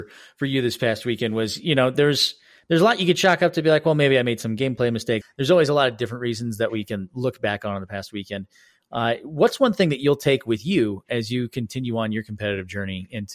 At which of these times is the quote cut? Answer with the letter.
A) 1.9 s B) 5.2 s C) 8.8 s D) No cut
B